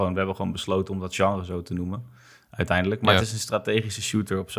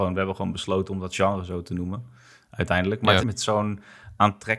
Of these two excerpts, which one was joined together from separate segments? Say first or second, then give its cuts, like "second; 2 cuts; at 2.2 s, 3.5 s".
second; 1 cut; at 3.2 s